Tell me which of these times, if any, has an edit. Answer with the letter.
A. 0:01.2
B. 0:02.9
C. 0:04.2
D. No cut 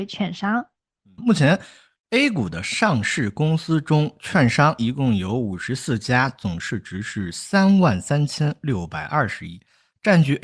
A